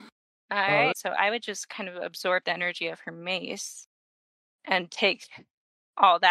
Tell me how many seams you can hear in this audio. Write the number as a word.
one